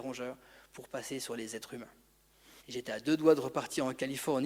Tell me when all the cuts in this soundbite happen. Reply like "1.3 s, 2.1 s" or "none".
2.6 s

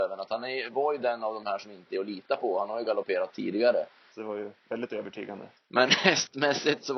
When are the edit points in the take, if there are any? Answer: 4.1 s, 5.6 s

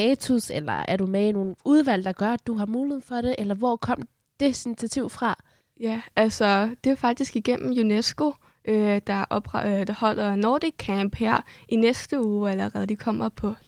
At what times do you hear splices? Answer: none

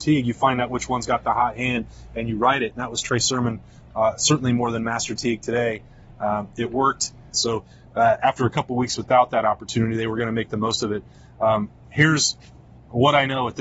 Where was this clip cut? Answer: 7.3 s

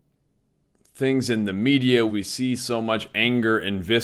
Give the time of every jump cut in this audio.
2.1 s

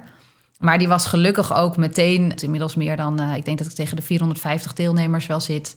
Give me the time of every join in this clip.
2.4 s

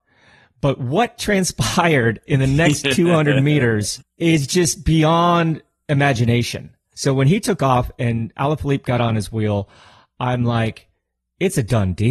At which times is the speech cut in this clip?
6.9 s

